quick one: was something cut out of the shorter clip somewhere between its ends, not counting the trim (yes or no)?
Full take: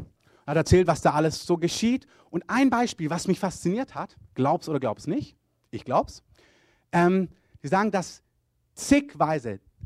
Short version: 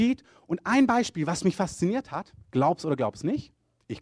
no